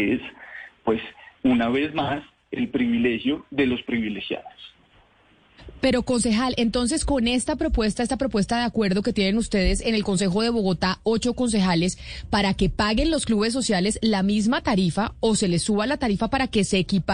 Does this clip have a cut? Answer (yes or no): no